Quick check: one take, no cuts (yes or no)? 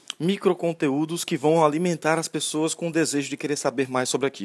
yes